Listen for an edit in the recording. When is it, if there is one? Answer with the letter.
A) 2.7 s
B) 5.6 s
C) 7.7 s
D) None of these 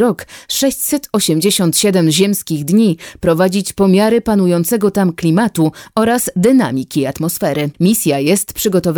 C